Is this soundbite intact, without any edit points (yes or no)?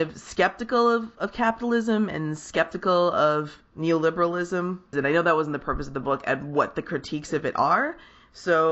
no